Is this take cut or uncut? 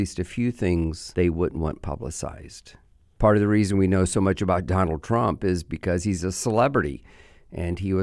uncut